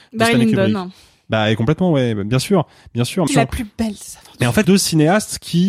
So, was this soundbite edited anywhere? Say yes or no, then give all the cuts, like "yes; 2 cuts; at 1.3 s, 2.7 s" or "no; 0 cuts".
yes; 2 cuts; at 3.3 s, 4.6 s